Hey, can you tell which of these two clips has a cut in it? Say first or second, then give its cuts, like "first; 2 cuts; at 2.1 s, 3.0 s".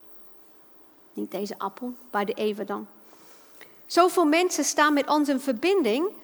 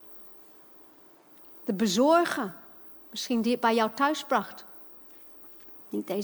first; 1 cut; at 1.1 s